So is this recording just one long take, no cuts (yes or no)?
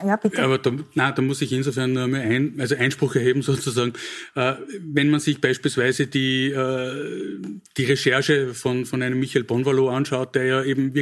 yes